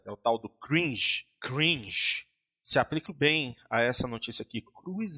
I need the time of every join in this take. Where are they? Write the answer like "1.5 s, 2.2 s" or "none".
3.1 s

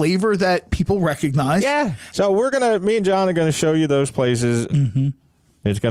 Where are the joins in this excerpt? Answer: 2.1 s, 4.7 s

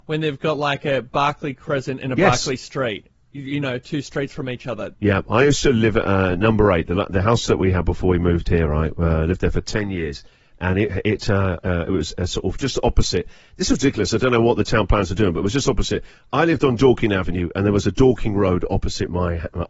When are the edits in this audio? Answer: 4.9 s

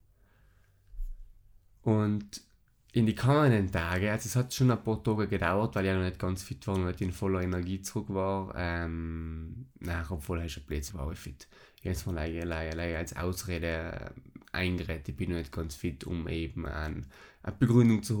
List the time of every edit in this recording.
10.9 s

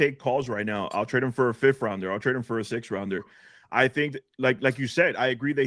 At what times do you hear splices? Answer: none

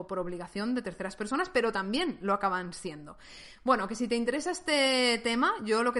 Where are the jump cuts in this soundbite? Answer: none

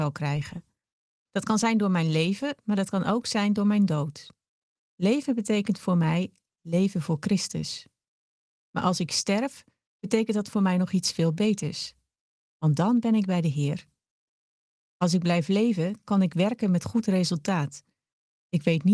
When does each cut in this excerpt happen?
none

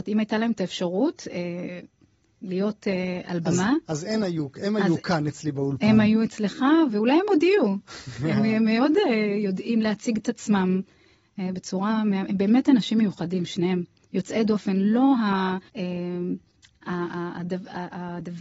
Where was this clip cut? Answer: 15.7 s

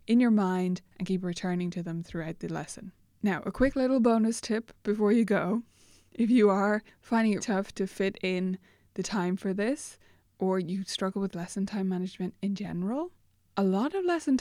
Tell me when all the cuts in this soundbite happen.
7.4 s

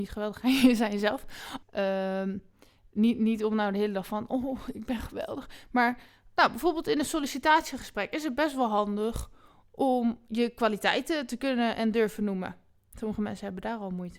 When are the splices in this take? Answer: 1.6 s

